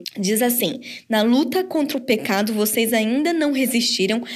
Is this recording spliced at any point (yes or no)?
no